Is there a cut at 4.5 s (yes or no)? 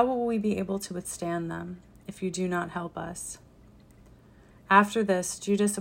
yes